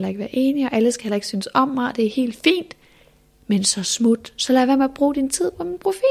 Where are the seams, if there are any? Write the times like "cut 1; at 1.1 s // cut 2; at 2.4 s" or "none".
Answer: none

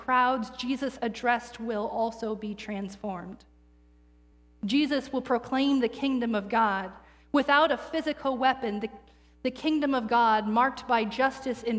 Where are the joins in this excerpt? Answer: none

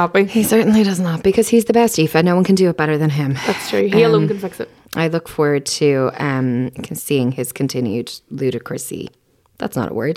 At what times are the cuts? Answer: none

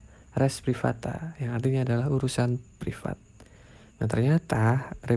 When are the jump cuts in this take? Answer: cut 1; at 3.9 s

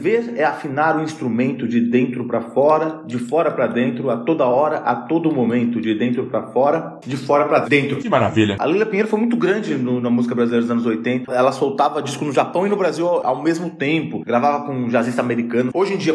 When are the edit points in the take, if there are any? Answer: cut 1; at 8.6 s // cut 2; at 11.2 s

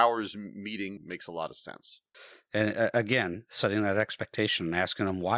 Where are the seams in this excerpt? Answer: cut 1; at 1.0 s

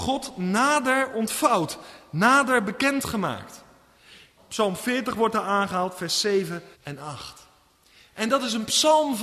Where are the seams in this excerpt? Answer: cut 1; at 4.4 s // cut 2; at 6.7 s

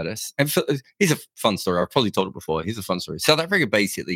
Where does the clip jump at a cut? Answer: none

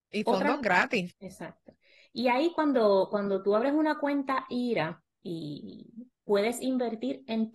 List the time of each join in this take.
cut 1; at 1.1 s

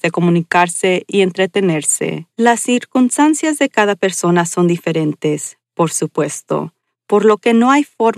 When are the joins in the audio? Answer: cut 1; at 2.3 s

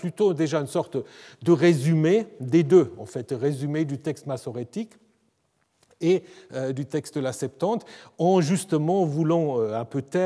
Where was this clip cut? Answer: none

